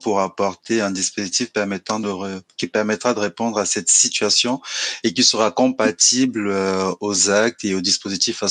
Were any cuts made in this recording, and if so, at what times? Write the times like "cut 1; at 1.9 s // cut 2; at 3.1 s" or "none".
none